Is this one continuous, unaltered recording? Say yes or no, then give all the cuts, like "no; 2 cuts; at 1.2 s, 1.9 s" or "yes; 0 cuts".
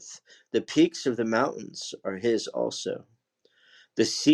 yes; 0 cuts